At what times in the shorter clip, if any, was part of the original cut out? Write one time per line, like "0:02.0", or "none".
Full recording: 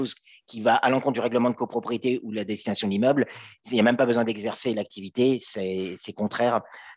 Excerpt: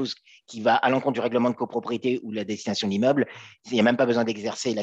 none